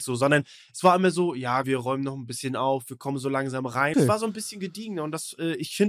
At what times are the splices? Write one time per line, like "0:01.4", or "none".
0:01.6
0:03.9